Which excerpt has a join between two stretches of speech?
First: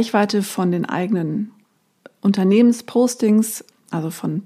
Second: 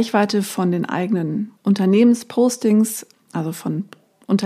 second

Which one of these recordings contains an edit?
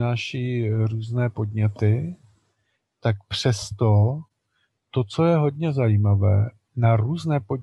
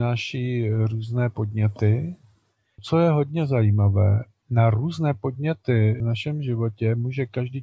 second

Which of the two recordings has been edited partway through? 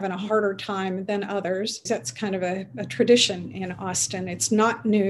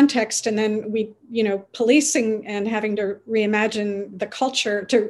first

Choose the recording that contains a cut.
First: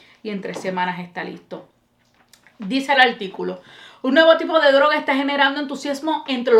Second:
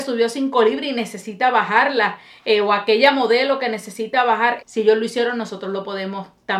second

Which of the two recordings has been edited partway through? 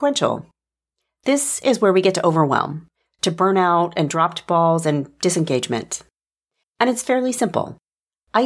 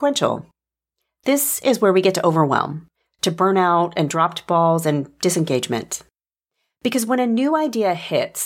first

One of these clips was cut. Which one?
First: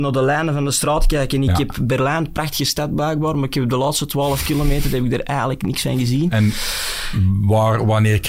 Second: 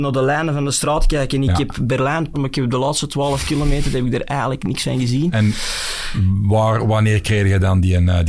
second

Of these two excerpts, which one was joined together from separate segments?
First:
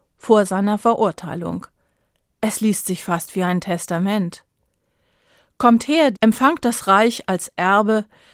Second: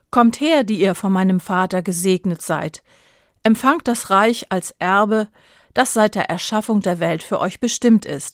first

